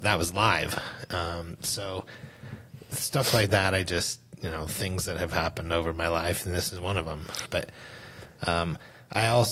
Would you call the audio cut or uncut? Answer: cut